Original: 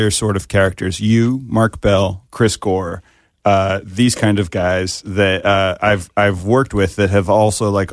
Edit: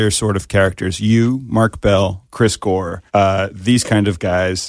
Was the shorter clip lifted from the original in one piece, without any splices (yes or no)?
no